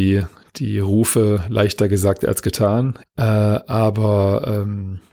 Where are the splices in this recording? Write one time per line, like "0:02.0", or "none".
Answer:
0:03.0